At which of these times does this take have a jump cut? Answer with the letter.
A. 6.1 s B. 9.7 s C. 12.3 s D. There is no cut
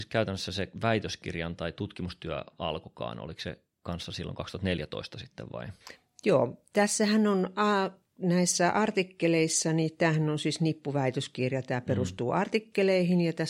D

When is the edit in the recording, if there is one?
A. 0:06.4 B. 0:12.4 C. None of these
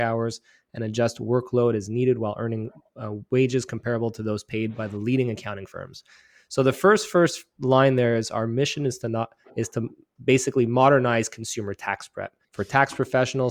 B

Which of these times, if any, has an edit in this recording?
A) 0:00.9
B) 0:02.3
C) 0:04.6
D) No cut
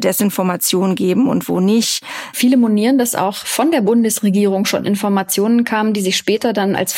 B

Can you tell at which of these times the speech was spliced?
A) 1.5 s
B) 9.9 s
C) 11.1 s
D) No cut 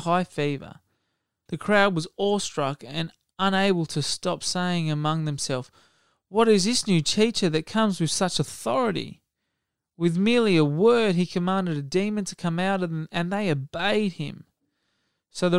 A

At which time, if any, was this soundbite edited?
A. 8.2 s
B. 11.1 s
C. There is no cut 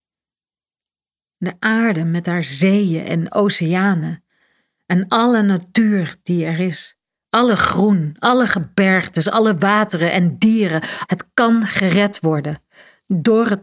B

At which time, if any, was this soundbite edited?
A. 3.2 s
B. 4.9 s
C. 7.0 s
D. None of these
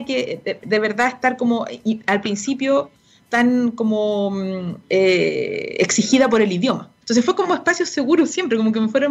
C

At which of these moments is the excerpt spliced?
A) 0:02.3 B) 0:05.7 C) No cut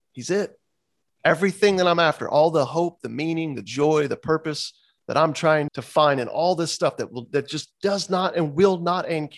B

